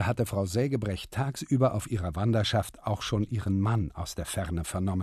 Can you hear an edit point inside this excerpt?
no; 0 cuts

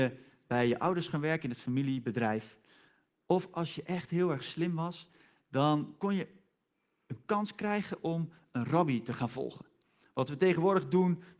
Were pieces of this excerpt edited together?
no; 0 cuts

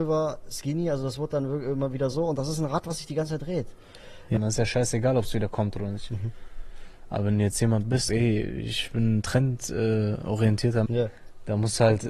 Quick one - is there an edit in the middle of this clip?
yes; 3 cuts; at 4.4 s, 8.1 s, 10.9 s

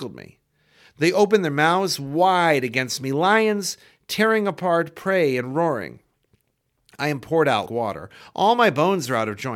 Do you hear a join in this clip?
yes; 1 cut; at 7.7 s

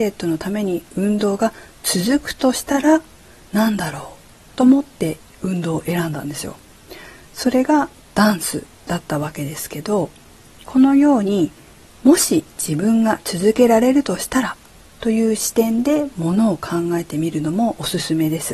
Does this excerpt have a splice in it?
no; 0 cuts

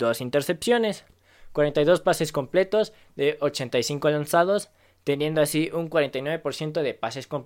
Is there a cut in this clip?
no; 0 cuts

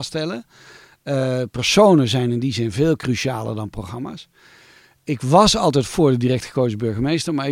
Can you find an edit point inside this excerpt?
no; 0 cuts

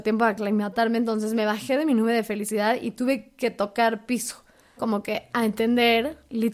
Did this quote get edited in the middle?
yes; 1 cut; at 4.8 s

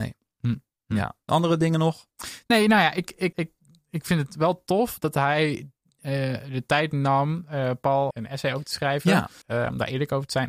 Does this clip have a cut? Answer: yes; 3 cuts; at 3.3 s, 8.1 s, 9.4 s

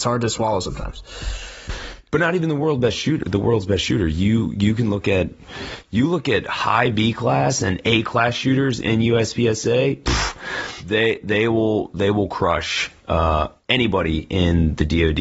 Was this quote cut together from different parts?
no; 0 cuts

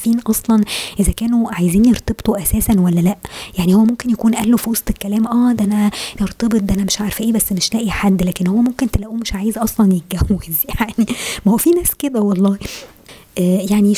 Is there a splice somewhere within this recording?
yes; 1 cut; at 6.2 s

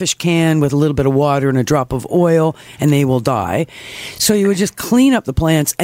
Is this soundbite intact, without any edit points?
yes; 0 cuts

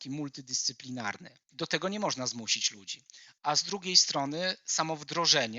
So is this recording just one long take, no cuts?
no; 1 cut; at 1.5 s

